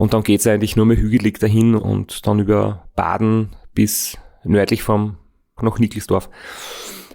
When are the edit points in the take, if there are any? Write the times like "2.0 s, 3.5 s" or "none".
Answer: 1.8 s, 5.6 s